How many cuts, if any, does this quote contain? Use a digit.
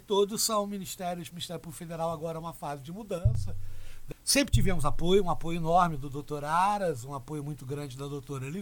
2